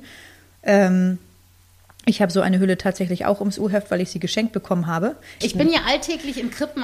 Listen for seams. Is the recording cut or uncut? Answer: cut